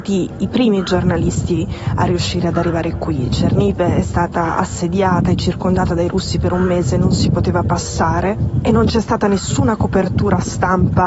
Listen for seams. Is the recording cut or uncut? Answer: uncut